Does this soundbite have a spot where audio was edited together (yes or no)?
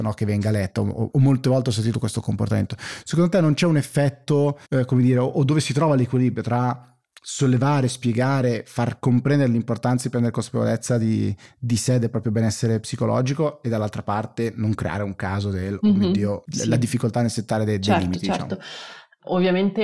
yes